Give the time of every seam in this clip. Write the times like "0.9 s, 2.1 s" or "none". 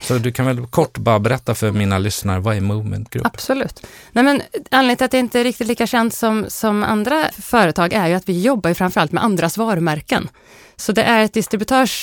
7.3 s